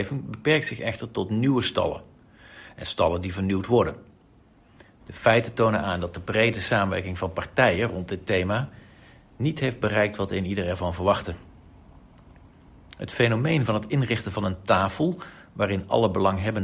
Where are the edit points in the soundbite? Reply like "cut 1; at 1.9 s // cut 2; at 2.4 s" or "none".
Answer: cut 1; at 5.0 s